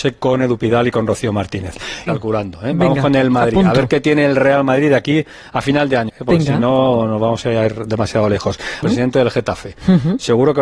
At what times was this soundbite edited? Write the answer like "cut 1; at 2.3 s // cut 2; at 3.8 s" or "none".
cut 1; at 2.1 s // cut 2; at 6.1 s // cut 3; at 8.8 s